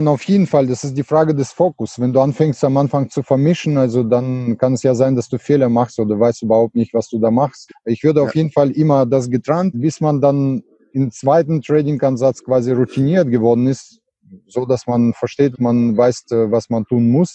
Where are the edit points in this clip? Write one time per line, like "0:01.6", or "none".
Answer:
0:07.7
0:09.7
0:15.5